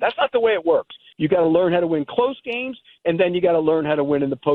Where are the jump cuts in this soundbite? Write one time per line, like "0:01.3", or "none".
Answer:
0:01.1
0:03.0